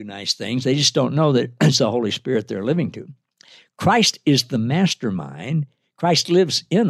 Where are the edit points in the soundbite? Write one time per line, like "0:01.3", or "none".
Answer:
none